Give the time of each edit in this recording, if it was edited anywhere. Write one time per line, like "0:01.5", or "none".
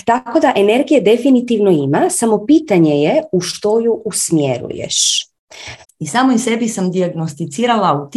0:05.8